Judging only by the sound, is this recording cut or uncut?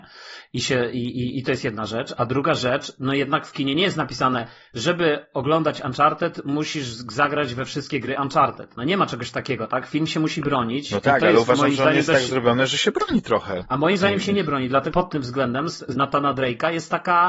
cut